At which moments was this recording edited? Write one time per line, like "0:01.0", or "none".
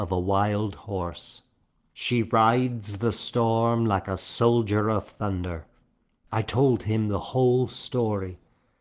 0:06.2